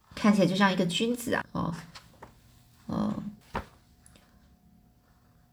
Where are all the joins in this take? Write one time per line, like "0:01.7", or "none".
0:01.4
0:03.4